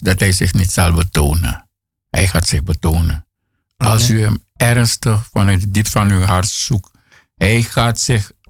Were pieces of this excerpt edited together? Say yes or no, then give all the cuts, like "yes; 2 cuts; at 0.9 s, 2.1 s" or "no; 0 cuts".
no; 0 cuts